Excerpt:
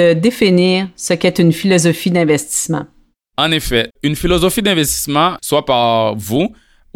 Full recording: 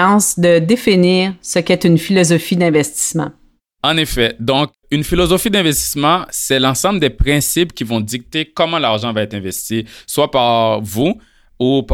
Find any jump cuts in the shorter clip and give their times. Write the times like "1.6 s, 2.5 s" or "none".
3.9 s, 5.4 s